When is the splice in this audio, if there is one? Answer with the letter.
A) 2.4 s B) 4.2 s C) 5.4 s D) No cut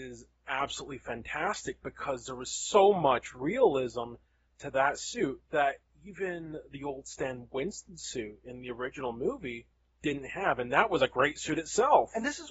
C